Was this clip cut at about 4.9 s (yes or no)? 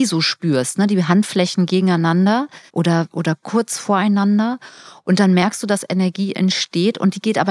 no